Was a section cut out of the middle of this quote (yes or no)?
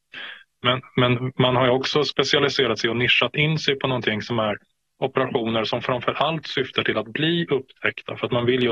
no